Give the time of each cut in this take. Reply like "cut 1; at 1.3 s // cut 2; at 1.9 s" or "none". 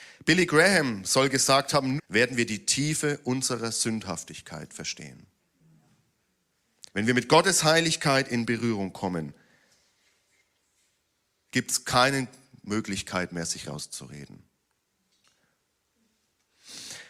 cut 1; at 2.0 s // cut 2; at 6.9 s